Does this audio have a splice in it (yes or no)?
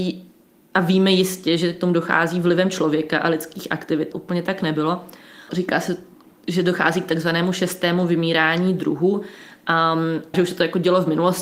yes